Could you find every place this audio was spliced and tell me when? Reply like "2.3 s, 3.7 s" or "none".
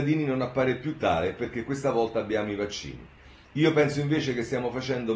none